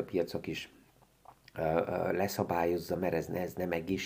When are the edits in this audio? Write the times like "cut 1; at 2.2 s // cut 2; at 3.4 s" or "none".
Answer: none